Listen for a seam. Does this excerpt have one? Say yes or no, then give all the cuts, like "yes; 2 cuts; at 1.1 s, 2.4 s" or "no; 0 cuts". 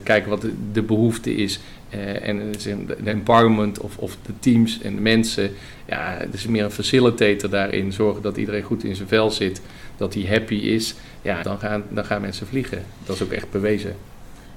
yes; 1 cut; at 11.4 s